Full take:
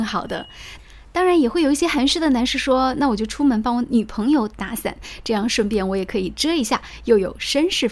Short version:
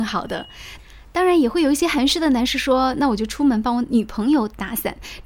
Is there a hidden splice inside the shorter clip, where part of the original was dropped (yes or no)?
no